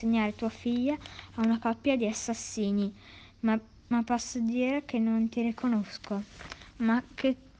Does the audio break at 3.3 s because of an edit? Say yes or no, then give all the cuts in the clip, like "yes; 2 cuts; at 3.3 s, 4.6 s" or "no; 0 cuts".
no; 0 cuts